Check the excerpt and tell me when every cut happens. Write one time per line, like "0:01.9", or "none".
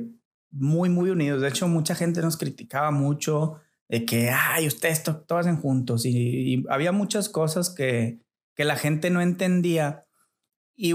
none